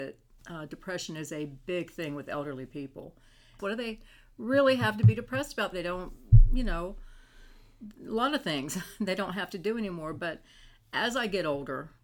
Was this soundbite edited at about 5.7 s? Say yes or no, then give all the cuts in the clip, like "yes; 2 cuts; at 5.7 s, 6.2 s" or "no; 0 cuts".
yes; 2 cuts; at 3.6 s, 5.7 s